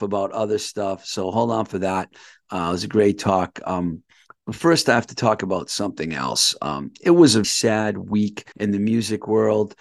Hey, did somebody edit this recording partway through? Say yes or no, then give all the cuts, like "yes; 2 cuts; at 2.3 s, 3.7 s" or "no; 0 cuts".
yes; 2 cuts; at 7.4 s, 8.5 s